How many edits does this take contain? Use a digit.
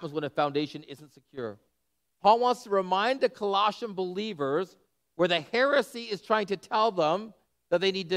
0